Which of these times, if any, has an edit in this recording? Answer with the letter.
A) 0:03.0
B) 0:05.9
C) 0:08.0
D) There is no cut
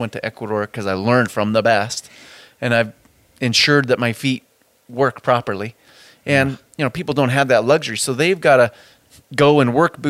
D